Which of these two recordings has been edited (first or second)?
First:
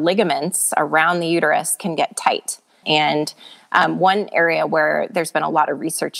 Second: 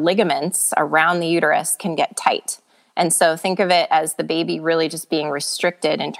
first